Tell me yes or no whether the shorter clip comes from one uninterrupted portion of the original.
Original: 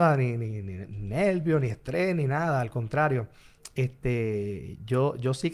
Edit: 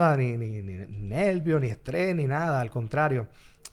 yes